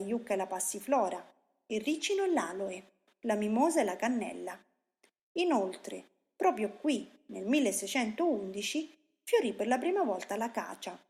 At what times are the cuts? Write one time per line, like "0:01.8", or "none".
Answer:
none